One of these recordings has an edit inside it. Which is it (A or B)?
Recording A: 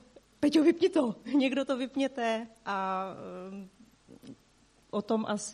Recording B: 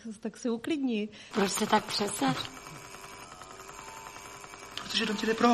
B